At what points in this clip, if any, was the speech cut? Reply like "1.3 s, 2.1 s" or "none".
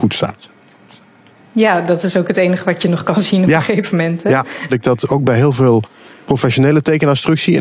4.7 s